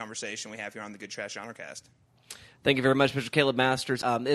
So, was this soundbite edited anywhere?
no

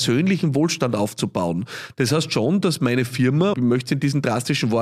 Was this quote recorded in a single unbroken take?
no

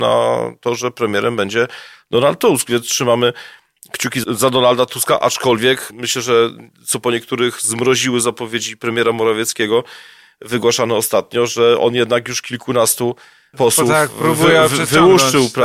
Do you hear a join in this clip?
no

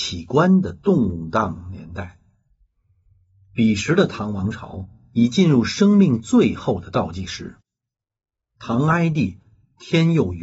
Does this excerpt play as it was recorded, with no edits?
yes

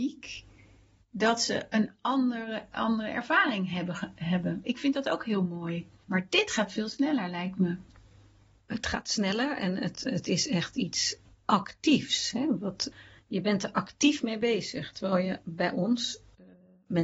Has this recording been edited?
yes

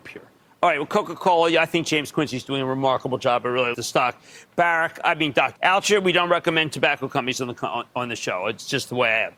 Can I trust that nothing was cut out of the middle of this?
no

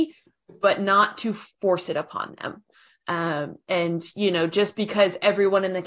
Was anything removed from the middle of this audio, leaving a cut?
no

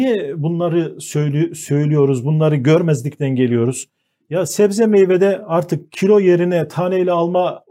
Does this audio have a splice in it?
no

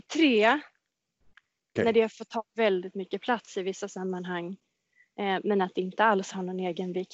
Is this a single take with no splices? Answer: no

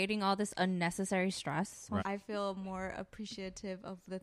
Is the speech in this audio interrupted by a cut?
yes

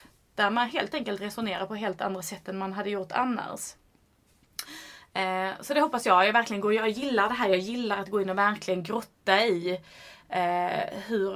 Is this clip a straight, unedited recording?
yes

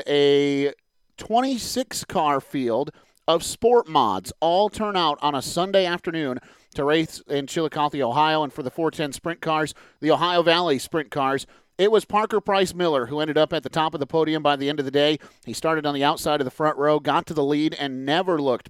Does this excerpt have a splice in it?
no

